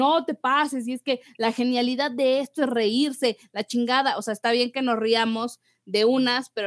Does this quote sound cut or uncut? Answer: uncut